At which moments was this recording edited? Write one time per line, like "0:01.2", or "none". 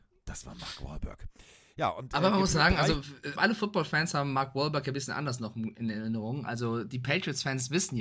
0:03.4